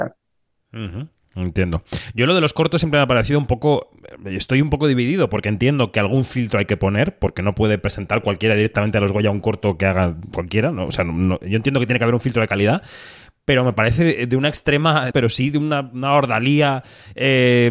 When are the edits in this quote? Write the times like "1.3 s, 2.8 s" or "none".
15.1 s